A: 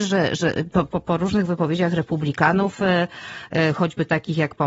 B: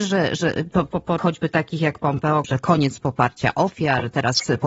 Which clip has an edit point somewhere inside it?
B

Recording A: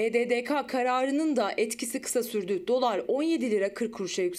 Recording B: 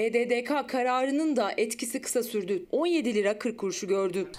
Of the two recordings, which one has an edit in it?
B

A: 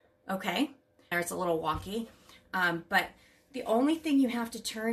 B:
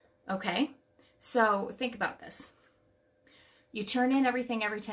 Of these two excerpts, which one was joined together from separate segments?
A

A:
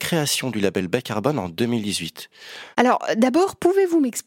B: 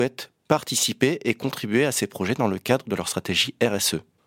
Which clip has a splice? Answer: A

